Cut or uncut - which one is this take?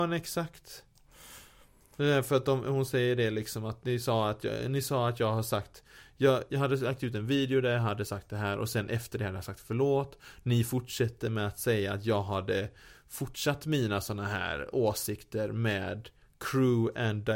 uncut